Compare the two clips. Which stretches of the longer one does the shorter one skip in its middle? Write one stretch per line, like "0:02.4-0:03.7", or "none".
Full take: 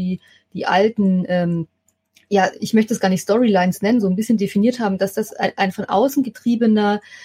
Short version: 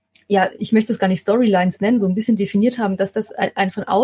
none